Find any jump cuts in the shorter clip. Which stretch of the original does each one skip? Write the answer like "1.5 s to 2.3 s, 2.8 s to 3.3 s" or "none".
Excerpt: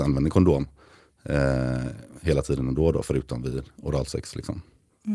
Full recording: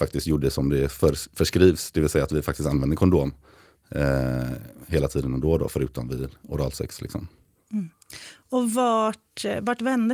none